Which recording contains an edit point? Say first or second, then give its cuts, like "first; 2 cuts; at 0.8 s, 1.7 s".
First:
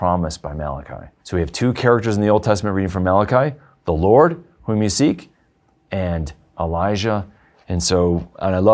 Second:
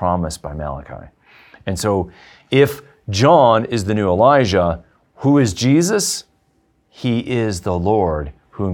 first; 2 cuts; at 1.2 s, 7.6 s